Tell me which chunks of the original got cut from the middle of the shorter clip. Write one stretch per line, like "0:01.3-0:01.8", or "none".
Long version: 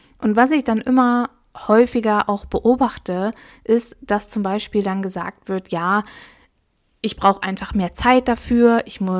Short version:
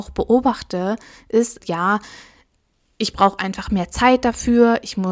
0:04.0-0:05.6

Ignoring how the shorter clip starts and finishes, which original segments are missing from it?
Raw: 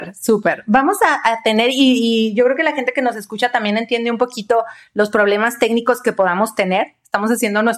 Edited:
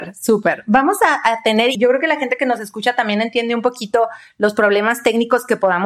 0:01.7-0:02.3

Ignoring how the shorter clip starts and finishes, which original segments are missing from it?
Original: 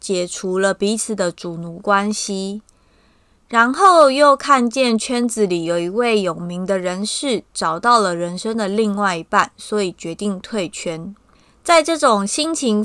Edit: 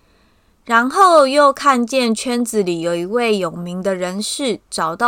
none

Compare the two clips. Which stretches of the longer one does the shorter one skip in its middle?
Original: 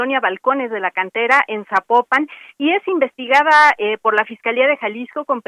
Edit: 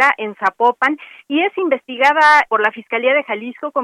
0:03.8-0:04.0

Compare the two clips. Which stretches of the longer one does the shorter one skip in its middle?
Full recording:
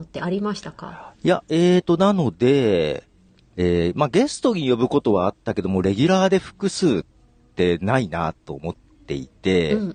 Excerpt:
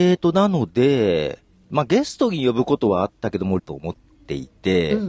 0:03.3-0:03.9
0:05.8-0:08.4

